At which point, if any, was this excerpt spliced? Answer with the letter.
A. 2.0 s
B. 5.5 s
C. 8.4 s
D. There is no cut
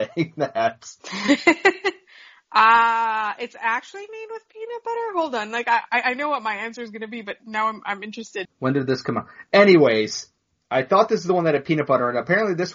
C